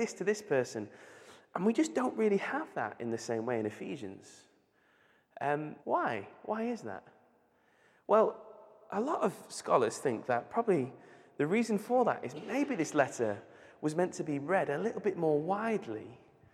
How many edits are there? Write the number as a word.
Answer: one